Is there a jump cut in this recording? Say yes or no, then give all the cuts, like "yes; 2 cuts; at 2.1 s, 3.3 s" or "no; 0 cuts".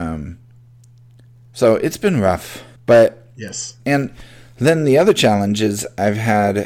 yes; 2 cuts; at 2.8 s, 3.8 s